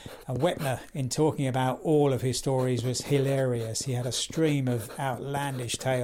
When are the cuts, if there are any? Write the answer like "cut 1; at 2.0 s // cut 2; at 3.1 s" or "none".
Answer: none